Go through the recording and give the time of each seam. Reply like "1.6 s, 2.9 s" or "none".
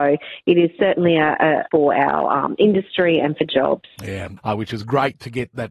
1.6 s, 4.4 s